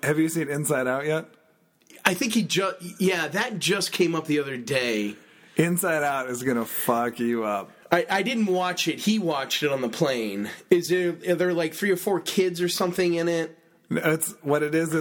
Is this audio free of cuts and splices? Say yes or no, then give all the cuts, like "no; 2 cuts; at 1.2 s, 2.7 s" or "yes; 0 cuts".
yes; 0 cuts